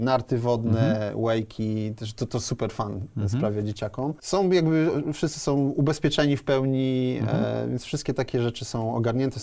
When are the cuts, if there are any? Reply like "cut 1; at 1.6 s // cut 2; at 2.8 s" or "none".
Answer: none